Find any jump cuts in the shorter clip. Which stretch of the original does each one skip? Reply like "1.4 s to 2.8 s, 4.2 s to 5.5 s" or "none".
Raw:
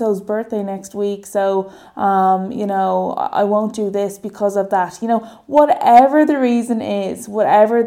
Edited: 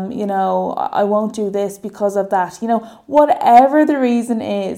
none